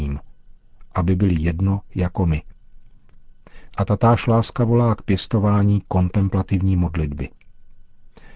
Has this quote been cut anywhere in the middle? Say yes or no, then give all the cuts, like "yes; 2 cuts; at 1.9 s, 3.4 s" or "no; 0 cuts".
yes; 1 cut; at 3.7 s